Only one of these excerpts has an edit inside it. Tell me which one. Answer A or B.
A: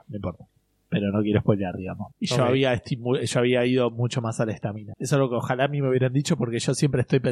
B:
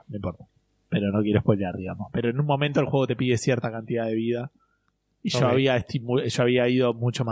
A